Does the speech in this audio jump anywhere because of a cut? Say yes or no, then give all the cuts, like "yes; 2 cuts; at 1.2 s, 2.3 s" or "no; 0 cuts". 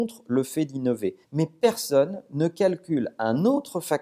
yes; 1 cut; at 1.2 s